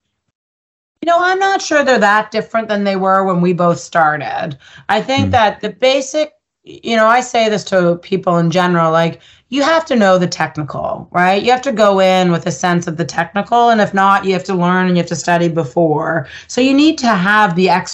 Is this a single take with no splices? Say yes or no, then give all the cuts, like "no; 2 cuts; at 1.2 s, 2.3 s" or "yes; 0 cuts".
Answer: yes; 0 cuts